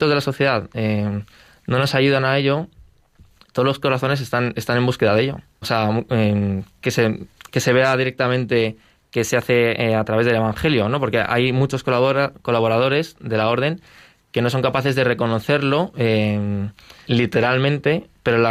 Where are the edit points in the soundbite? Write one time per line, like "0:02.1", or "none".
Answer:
0:05.6
0:17.0